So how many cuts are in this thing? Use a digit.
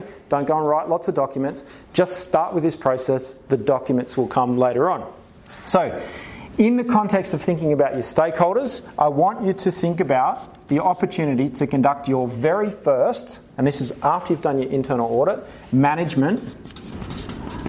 0